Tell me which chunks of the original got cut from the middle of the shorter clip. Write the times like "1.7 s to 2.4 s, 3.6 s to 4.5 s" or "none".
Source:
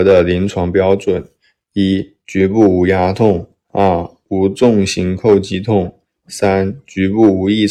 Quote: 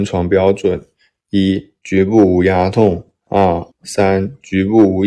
4.1 s to 6.2 s